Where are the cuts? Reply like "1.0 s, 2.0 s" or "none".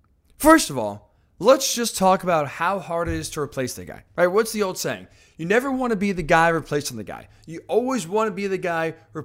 none